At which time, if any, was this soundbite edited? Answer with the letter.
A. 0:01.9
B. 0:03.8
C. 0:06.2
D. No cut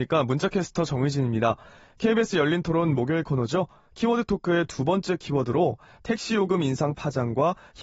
D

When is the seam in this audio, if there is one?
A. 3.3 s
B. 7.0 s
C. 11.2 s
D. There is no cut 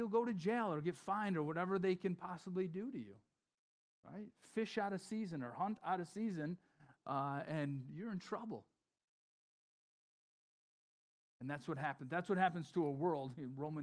C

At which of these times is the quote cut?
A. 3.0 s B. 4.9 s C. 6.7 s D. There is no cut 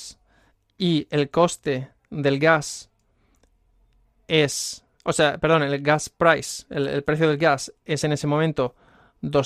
D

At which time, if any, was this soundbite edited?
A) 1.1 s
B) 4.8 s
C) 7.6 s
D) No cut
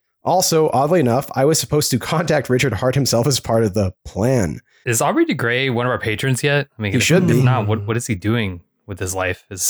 B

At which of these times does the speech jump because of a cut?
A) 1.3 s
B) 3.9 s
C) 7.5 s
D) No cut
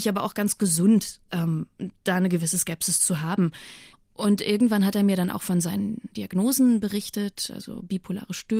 B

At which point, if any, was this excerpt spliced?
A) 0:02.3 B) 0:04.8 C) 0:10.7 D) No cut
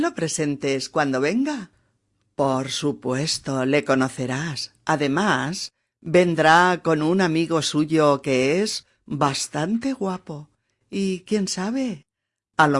C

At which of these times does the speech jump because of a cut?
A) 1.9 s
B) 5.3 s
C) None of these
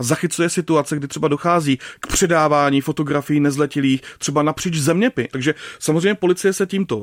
B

